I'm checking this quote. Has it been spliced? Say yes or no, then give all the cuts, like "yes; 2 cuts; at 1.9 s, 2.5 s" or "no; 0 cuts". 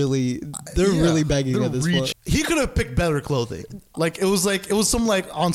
yes; 1 cut; at 2.1 s